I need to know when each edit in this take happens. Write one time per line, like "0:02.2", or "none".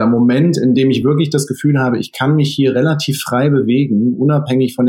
none